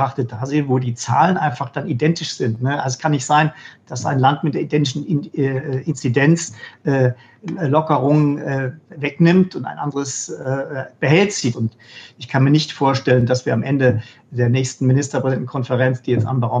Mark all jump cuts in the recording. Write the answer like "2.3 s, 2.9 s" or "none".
11.5 s